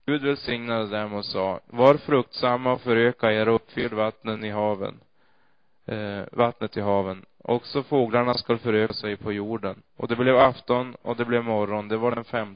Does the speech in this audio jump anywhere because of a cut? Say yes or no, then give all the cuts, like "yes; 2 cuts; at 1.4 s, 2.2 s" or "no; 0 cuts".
no; 0 cuts